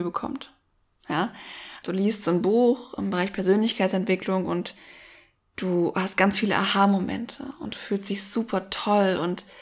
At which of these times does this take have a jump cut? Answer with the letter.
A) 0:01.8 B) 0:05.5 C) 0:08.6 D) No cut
A